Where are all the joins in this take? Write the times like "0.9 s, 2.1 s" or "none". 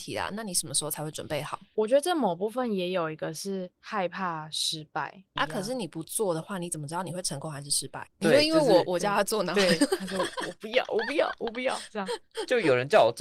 5.4 s, 8.1 s